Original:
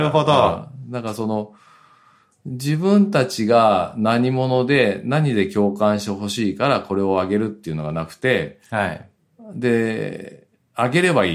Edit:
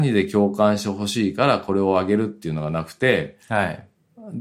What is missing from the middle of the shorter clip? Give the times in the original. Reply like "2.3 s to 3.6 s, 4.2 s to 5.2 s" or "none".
none